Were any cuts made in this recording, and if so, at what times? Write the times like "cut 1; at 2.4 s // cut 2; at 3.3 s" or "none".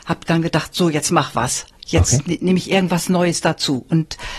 none